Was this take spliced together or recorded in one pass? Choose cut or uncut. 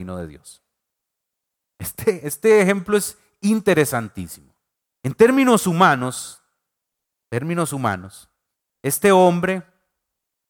uncut